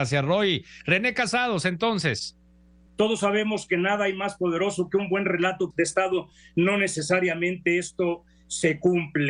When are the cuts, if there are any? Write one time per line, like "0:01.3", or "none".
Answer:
0:02.9
0:05.7